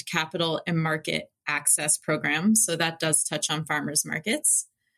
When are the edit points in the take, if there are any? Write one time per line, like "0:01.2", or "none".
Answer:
none